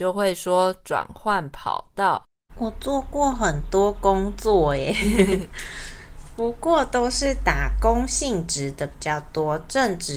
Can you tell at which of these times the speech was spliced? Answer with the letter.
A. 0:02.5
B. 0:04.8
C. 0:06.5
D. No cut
A